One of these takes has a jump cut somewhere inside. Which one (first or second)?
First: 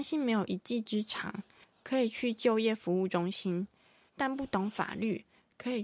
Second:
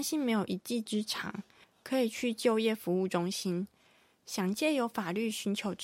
first